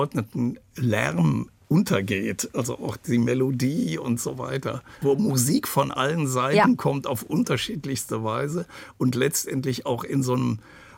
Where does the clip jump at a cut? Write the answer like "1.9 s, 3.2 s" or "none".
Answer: 5.0 s